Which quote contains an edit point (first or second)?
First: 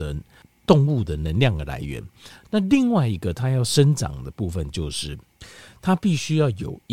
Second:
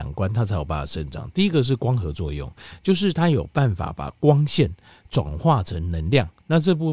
first